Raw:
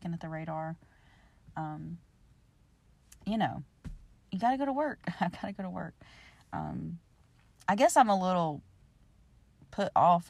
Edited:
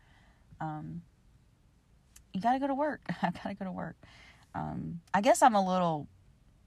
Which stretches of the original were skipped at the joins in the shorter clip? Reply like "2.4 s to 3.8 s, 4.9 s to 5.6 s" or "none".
3.2 s to 4.2 s, 7.1 s to 7.6 s